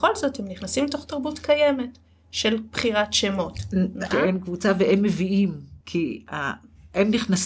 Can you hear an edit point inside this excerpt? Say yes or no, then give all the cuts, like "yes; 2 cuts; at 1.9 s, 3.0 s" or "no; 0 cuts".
yes; 2 cuts; at 4.1 s, 5.8 s